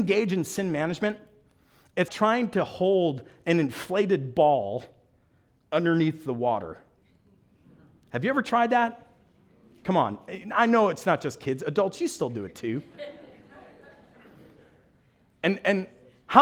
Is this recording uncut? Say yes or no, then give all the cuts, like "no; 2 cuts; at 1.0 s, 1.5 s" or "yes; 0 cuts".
no; 1 cut; at 2.1 s